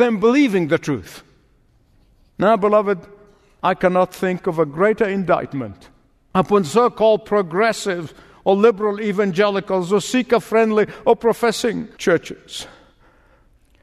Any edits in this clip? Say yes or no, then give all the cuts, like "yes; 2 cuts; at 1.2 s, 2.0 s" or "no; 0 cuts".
no; 0 cuts